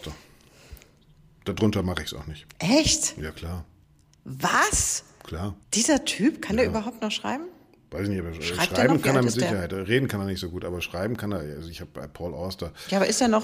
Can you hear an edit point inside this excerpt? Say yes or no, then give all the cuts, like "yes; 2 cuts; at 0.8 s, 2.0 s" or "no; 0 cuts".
yes; 1 cut; at 5.6 s